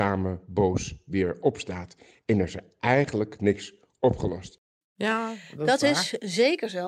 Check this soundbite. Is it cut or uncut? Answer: cut